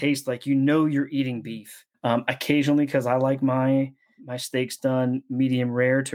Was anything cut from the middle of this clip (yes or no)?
yes